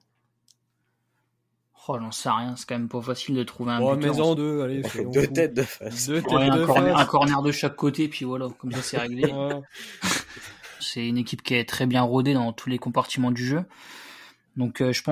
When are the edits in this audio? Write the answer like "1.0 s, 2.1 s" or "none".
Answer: 4.3 s, 10.8 s